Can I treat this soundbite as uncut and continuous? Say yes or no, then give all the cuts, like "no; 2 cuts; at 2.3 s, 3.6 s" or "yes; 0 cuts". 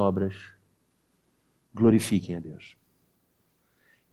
yes; 0 cuts